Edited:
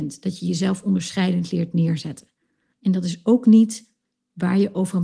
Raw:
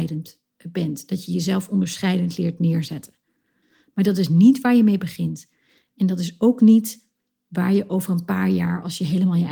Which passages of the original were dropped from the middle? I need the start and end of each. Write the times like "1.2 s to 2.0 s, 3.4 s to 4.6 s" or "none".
3.6 s to 5.9 s

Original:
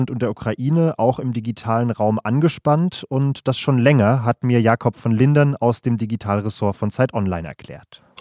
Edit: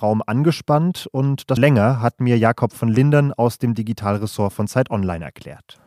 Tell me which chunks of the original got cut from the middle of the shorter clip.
3.5 s to 3.8 s

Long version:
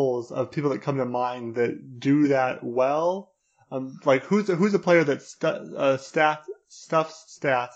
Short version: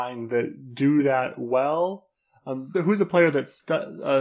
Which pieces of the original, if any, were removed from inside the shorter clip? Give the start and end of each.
4.0 s to 4.5 s

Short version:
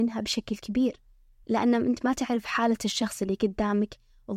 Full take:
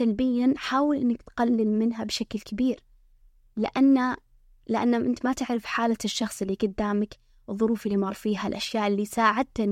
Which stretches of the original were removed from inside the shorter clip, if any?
3.3 s to 4.6 s

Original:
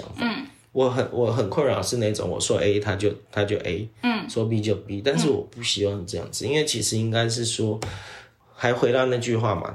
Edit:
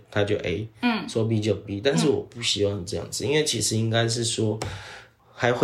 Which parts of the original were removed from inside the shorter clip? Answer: none

